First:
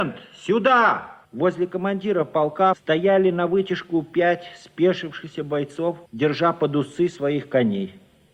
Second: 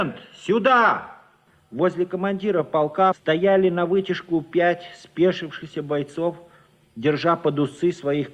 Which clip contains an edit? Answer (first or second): first